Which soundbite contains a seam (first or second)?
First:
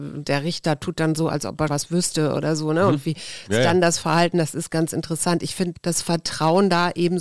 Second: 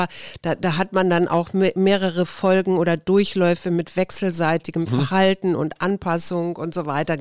first